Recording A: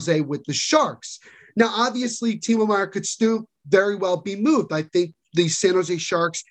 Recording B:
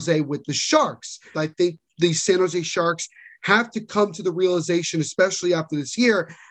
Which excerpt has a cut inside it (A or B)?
B